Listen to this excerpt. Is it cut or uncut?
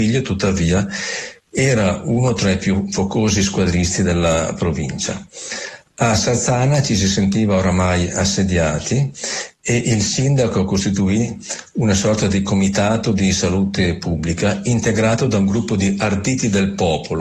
uncut